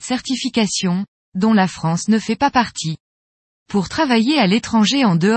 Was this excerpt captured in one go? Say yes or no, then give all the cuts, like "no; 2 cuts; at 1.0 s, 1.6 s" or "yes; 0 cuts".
yes; 0 cuts